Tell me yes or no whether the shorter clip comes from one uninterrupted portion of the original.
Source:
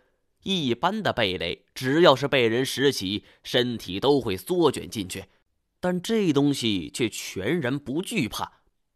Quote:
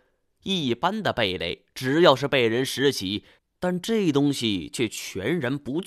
no